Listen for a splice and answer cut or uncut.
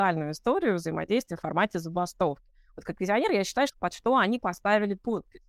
cut